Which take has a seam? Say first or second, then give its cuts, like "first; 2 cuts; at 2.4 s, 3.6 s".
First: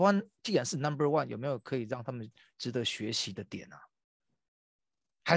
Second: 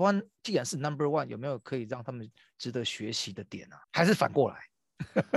second; 1 cut; at 3.8 s